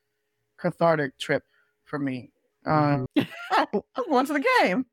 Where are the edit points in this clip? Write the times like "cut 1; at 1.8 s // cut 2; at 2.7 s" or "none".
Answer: cut 1; at 3.1 s